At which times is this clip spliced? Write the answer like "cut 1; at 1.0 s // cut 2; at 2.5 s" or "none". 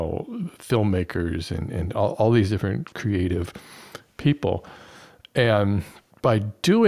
none